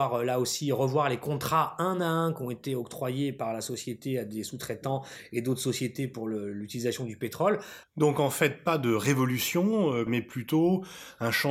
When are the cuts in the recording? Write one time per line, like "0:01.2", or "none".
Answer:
0:07.8
0:10.1